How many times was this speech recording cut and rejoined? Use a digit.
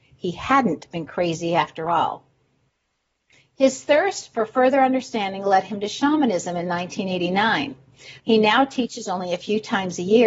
1